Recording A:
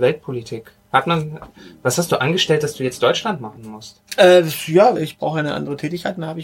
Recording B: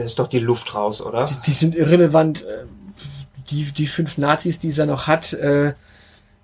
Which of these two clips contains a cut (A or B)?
A